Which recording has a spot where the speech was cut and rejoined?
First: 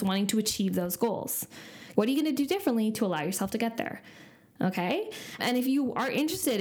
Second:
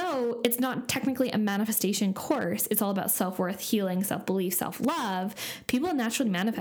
first; 2 cuts; at 1.9 s, 5.4 s

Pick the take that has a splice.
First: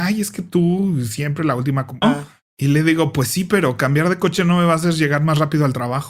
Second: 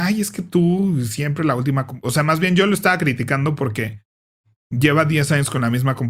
first; 1 cut; at 2.0 s

